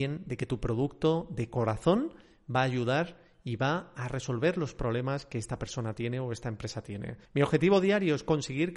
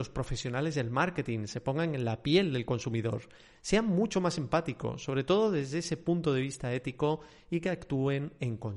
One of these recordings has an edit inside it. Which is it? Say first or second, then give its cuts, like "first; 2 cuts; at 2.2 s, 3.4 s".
first; 1 cut; at 7.2 s